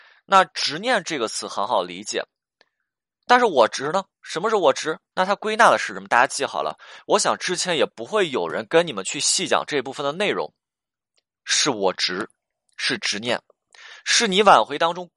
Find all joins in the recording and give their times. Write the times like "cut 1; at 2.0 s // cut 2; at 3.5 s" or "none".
cut 1; at 5.1 s // cut 2; at 11.2 s